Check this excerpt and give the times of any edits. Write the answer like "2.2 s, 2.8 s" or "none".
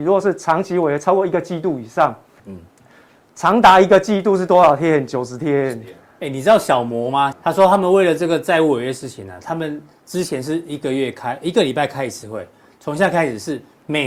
2.4 s, 7.3 s